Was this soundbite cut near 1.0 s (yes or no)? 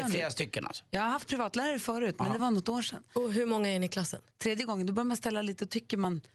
no